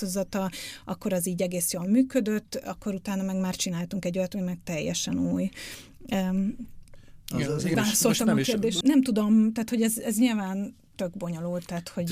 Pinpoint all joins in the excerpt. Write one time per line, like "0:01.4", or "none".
0:07.7
0:08.8